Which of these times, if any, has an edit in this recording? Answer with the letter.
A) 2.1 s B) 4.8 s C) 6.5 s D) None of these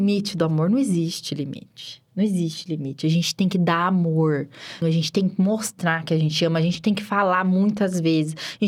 B